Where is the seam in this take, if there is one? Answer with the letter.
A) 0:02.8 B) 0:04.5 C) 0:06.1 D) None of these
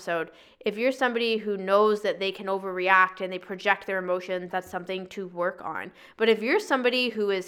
B